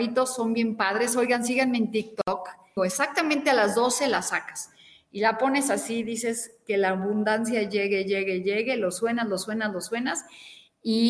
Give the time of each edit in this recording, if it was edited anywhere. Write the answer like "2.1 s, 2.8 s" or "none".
2.8 s